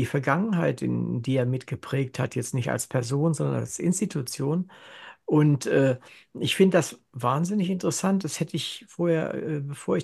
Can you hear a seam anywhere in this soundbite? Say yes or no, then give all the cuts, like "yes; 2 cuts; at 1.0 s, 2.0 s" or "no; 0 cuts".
no; 0 cuts